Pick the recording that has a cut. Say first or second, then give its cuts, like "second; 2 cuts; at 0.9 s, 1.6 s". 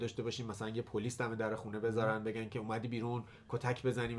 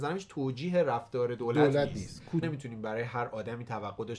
second; 1 cut; at 2.4 s